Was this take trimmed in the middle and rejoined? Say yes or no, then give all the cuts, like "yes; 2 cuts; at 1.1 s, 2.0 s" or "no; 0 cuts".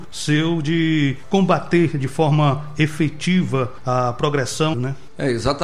yes; 1 cut; at 4.7 s